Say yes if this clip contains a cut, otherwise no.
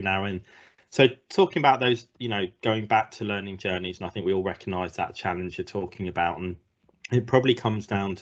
no